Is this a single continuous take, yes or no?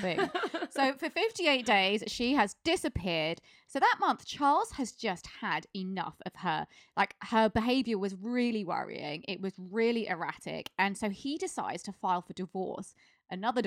yes